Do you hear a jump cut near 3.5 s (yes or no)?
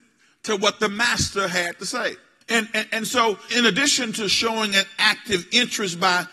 yes